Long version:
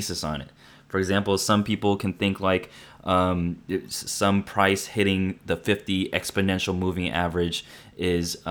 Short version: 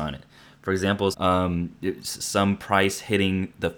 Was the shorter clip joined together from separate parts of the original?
yes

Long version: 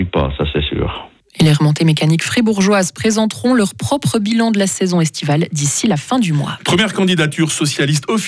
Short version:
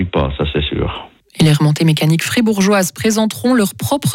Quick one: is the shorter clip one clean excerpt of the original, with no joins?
yes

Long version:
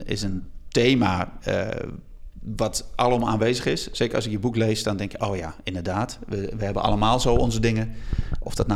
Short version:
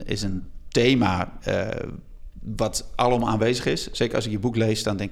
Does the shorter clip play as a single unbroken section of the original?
yes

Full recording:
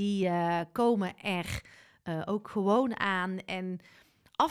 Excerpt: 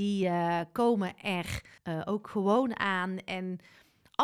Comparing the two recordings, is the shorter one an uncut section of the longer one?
no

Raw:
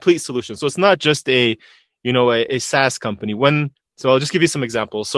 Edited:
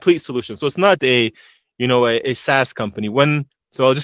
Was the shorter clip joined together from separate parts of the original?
yes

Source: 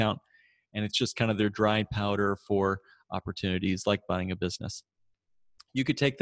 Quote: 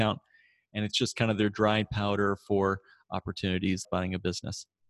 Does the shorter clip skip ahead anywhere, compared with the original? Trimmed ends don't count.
yes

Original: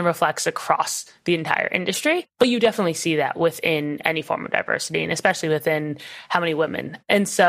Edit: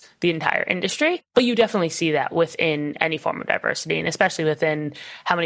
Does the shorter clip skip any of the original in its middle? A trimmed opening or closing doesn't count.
no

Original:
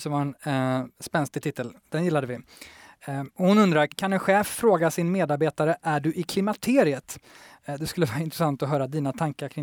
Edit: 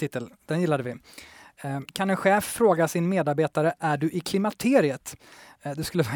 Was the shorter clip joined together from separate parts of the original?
yes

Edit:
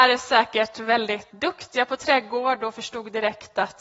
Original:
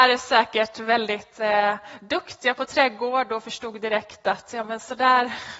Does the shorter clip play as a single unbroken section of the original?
no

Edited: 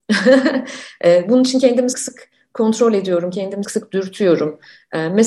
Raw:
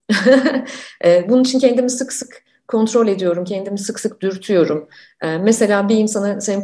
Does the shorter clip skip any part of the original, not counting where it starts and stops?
yes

